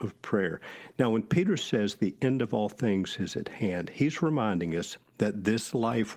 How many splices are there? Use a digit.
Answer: 0